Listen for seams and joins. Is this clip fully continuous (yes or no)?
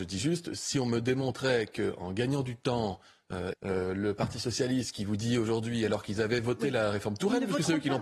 no